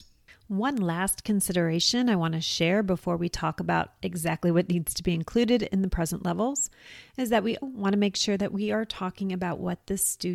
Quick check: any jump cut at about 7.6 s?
yes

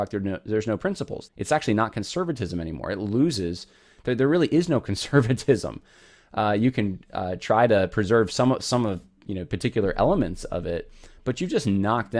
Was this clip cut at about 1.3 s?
yes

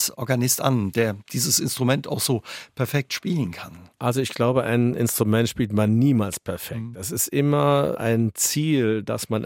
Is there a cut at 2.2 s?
no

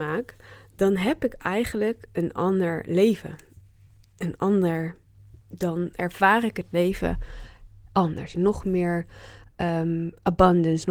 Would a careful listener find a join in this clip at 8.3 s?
yes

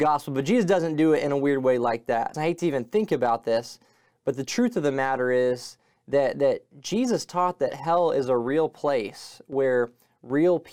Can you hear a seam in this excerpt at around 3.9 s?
no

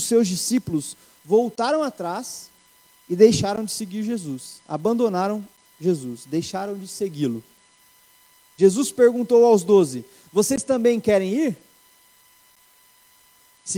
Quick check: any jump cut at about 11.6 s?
no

